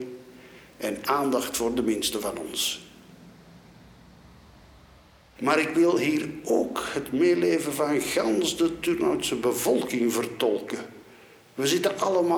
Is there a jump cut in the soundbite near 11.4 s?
no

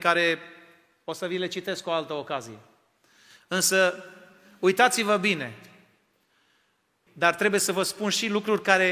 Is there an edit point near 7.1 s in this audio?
yes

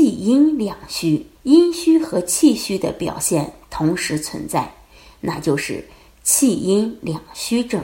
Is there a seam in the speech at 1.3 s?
yes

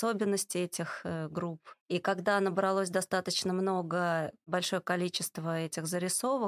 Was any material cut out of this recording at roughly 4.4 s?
no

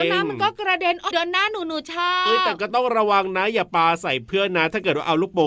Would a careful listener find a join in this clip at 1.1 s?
yes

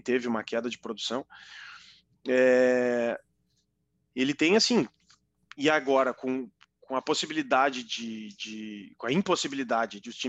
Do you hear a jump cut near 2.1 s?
no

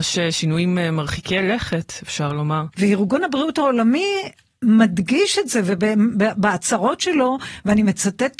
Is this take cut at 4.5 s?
no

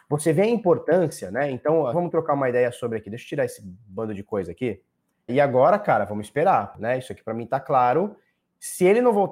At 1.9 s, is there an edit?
yes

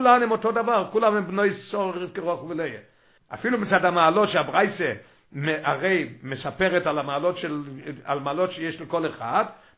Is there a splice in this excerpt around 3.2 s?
yes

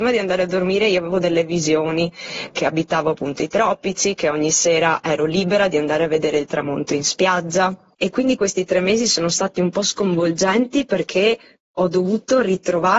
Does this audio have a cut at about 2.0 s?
no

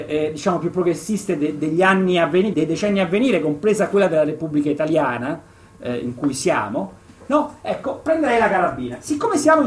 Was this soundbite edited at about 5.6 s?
no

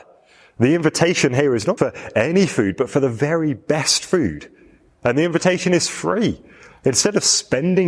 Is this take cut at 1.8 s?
yes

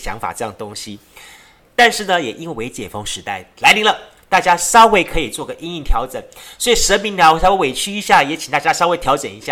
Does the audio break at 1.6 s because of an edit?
no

